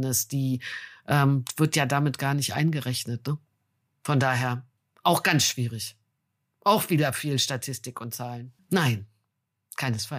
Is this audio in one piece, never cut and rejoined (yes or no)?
no